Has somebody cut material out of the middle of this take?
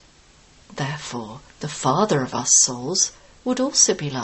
yes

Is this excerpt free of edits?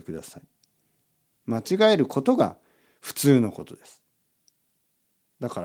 no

